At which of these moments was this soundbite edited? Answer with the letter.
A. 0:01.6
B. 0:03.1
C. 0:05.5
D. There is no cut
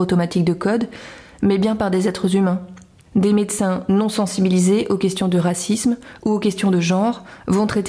B